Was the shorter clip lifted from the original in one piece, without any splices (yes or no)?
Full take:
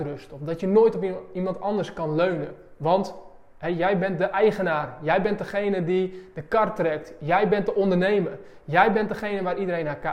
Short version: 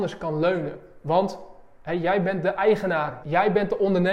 no